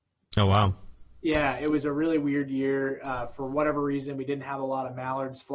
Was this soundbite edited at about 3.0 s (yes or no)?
no